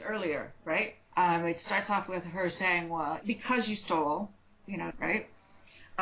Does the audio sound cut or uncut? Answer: cut